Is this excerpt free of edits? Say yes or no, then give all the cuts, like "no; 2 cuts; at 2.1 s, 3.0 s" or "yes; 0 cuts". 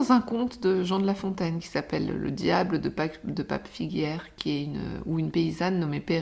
yes; 0 cuts